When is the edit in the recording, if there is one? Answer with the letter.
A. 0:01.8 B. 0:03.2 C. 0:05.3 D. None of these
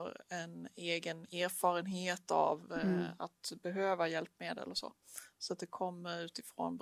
D